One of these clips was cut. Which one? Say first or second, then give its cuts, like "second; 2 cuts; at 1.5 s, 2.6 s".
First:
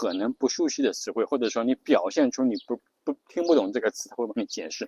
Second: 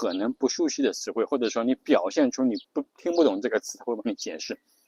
second; 1 cut; at 2.6 s